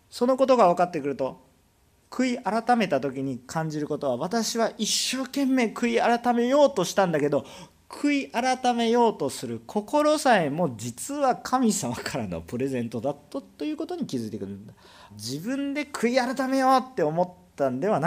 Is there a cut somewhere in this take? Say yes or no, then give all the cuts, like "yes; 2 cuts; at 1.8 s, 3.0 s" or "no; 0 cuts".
yes; 1 cut; at 15.1 s